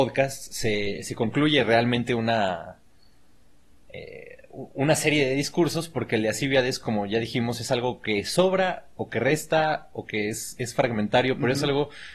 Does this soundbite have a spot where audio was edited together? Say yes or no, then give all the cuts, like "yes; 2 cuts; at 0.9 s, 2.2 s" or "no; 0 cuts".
no; 0 cuts